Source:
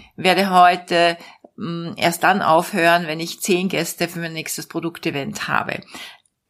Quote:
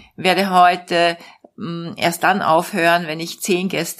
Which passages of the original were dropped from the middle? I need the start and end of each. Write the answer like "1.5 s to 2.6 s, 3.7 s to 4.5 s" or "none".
none